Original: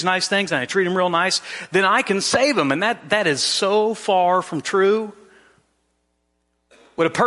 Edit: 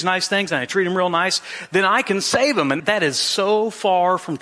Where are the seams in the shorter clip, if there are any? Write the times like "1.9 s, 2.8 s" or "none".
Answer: 2.8 s